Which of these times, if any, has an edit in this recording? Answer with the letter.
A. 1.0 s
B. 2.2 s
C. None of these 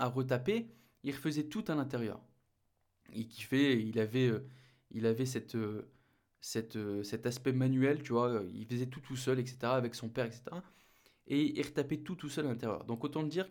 C